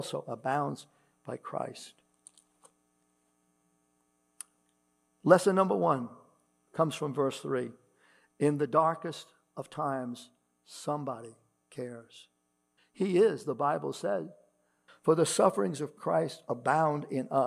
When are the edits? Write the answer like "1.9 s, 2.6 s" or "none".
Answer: 12.8 s, 14.9 s